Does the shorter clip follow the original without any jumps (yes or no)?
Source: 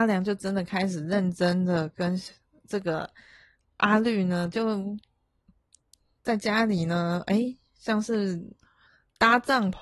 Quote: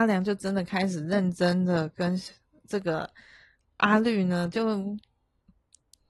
yes